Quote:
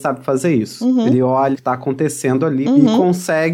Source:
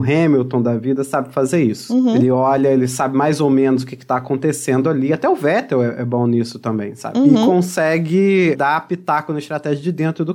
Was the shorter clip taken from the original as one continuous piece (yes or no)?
no